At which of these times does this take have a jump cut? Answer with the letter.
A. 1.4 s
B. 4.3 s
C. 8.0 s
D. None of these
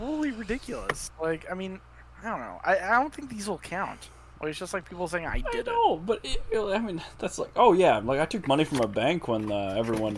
D